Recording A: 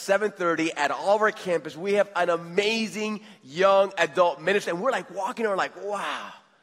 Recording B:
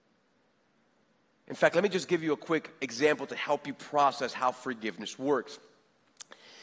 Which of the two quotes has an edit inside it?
A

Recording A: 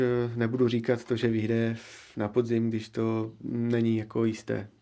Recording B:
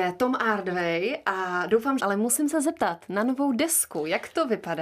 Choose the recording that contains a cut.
B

